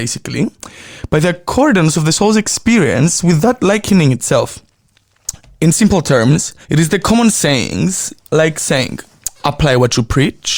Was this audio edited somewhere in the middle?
yes; 1 cut; at 6.6 s

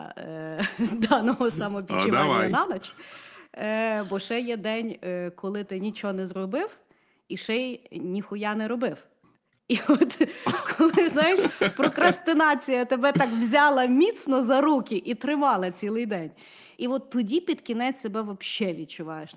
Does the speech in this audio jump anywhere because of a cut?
yes; 1 cut; at 16.7 s

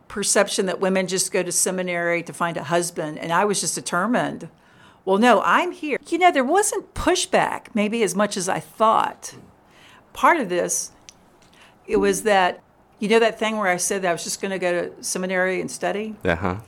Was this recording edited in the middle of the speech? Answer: yes; 1 cut; at 6.0 s

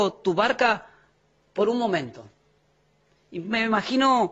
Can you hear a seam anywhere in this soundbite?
no; 0 cuts

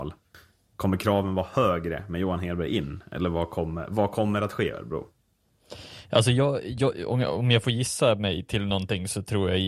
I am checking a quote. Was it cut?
no; 0 cuts

